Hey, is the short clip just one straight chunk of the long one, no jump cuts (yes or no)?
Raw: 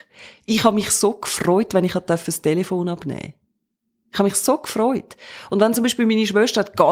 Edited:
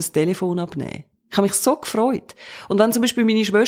no